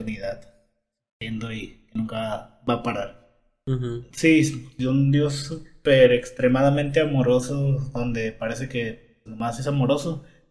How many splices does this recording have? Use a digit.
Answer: 2